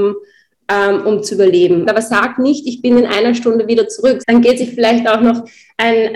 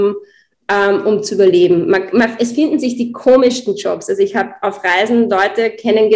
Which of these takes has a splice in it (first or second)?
first